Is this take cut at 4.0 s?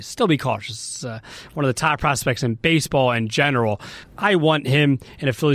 yes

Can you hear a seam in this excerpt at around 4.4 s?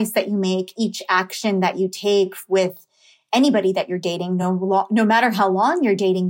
no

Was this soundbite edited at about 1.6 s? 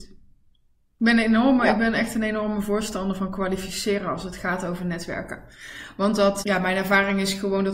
no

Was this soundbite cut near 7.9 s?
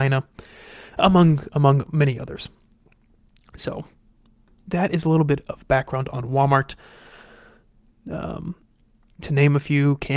yes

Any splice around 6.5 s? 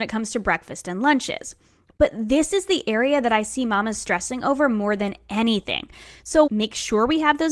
yes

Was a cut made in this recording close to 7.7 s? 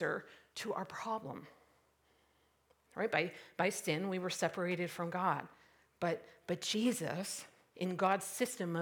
yes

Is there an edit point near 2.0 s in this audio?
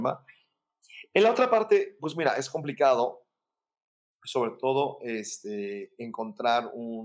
no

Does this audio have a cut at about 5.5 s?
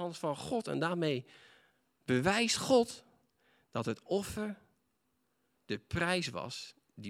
yes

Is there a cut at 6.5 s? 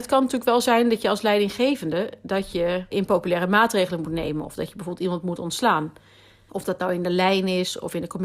yes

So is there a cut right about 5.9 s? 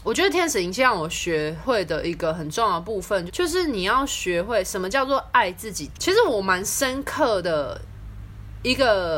yes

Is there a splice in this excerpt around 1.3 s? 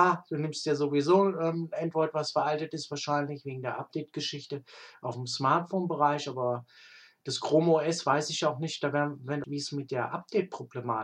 no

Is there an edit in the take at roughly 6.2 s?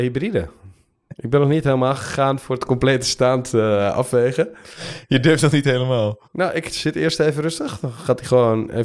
yes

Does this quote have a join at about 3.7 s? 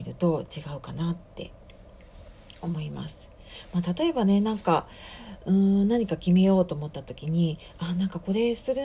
no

